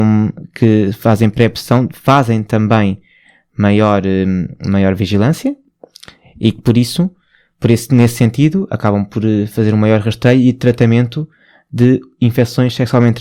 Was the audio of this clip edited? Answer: no; 0 cuts

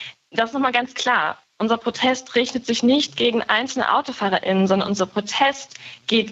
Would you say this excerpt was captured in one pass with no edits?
yes; 0 cuts

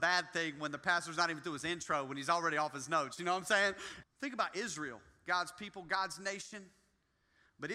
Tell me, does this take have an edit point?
yes; 1 cut; at 4.0 s

